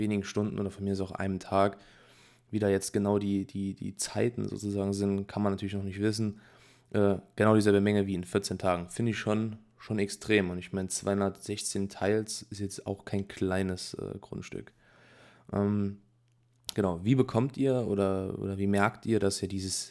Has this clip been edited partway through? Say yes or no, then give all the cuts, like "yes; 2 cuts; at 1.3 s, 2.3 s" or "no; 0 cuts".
no; 0 cuts